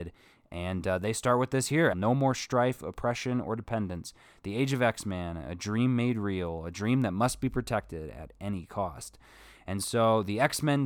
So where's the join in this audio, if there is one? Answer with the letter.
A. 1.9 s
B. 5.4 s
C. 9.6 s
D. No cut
A